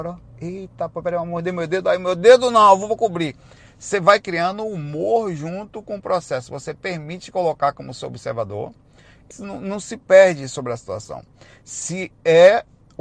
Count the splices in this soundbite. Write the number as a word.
one